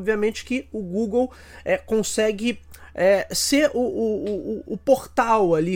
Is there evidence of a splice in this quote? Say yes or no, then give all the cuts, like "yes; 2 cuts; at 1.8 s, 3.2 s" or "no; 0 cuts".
no; 0 cuts